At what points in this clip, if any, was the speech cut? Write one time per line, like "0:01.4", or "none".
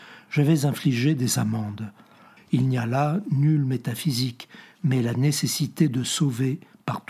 0:02.4